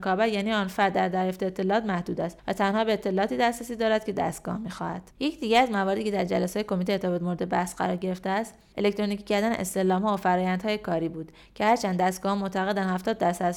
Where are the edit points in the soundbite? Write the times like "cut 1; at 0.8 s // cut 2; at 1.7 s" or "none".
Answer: cut 1; at 5.1 s